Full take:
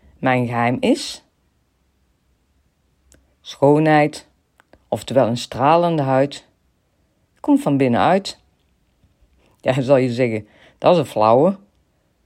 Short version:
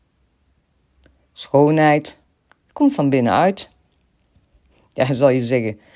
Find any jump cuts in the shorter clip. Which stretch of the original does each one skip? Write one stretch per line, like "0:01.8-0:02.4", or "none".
0:04.7-0:07.3